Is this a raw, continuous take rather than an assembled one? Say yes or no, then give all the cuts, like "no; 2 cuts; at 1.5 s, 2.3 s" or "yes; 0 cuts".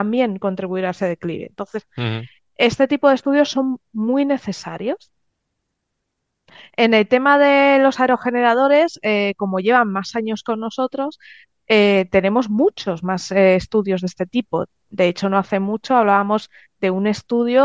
yes; 0 cuts